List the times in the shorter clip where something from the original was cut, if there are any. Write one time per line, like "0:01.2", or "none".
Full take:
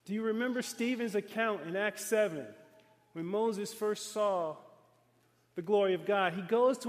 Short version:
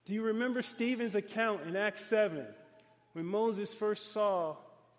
none